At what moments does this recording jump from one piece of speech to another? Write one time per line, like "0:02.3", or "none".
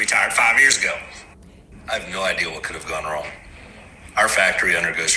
0:01.7